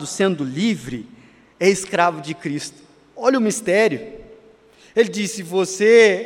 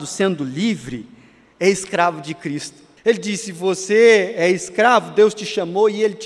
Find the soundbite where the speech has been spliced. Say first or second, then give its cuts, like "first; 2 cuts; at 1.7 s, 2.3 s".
second; 1 cut; at 3.0 s